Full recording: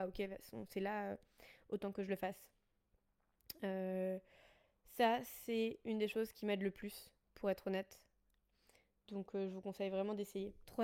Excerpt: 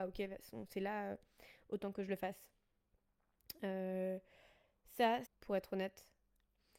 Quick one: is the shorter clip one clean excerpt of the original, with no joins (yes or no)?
no